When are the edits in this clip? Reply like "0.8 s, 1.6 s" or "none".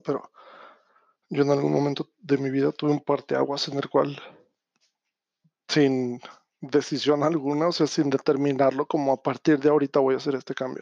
none